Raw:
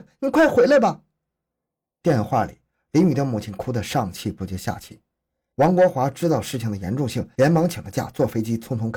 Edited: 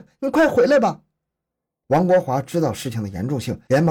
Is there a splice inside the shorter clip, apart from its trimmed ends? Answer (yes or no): yes